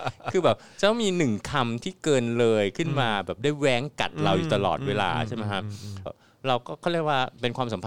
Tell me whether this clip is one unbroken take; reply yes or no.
no